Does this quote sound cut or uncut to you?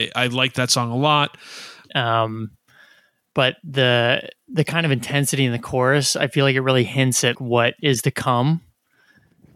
cut